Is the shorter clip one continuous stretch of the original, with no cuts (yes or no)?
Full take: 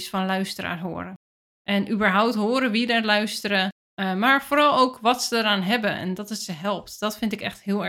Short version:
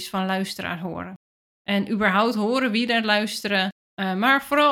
yes